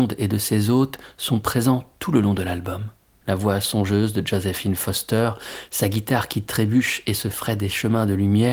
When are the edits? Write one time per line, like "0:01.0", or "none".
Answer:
0:03.2
0:05.7